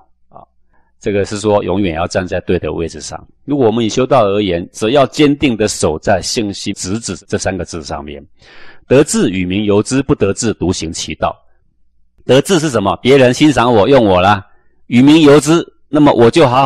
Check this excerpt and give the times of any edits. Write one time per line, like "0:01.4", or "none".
0:06.7